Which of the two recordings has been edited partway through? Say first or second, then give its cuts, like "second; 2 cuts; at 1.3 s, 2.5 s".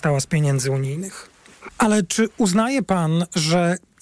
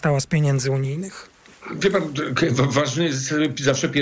first; 1 cut; at 1.7 s